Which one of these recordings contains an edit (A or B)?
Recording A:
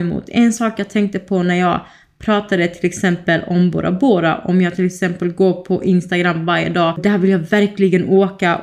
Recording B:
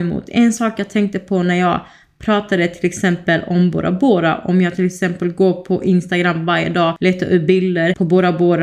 A